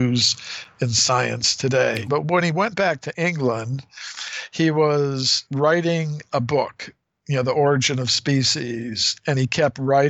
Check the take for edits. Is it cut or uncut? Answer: cut